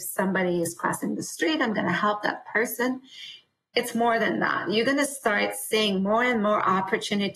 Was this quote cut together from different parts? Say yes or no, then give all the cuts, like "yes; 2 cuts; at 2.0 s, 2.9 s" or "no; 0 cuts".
no; 0 cuts